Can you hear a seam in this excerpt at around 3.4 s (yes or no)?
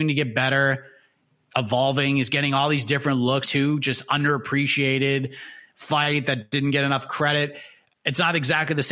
yes